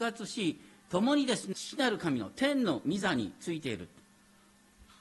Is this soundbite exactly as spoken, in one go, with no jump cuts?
no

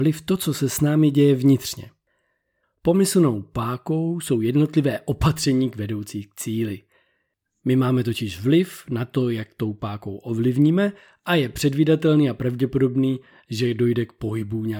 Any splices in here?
yes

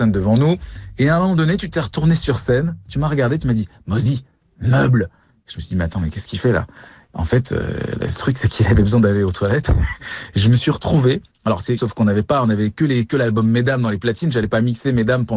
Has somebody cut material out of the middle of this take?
yes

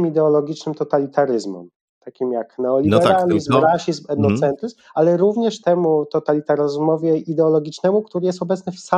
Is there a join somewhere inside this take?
yes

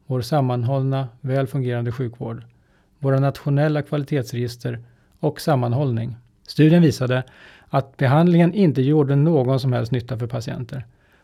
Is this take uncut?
no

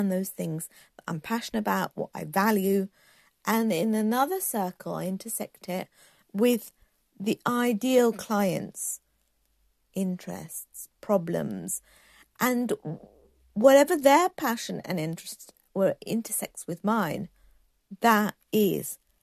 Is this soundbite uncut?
no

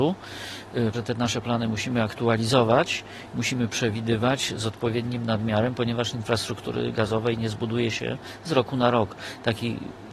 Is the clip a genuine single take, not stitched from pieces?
no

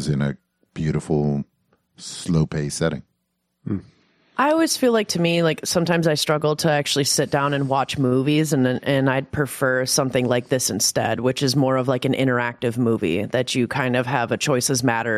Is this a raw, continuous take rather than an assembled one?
yes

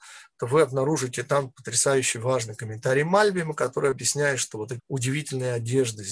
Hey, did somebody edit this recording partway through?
yes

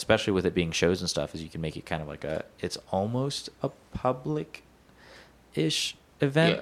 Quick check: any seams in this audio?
no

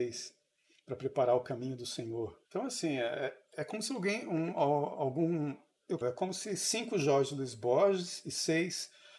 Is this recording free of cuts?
no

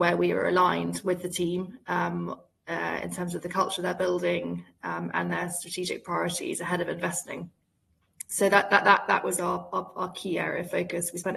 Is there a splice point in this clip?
no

